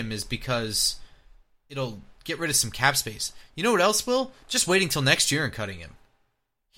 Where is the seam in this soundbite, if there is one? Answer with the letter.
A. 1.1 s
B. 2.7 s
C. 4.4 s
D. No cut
D